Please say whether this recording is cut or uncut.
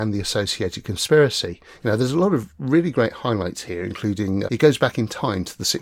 cut